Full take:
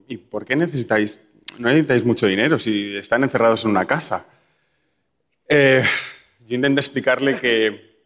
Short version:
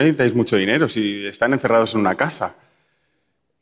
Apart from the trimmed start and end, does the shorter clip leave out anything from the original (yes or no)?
no